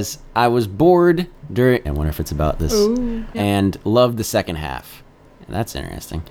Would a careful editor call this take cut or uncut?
cut